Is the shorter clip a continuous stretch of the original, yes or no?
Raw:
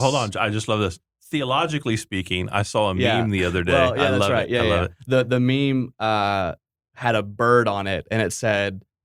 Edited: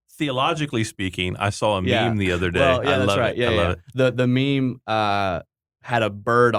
yes